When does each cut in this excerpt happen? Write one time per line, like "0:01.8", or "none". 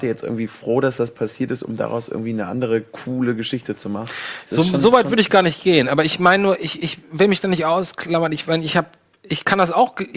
none

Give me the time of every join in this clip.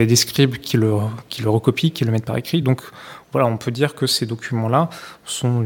none

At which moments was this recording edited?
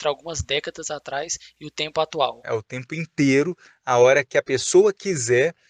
0:02.4

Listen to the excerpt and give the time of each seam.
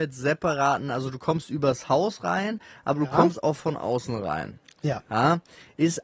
0:04.7

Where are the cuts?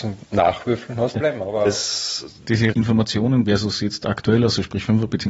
0:01.1
0:03.4

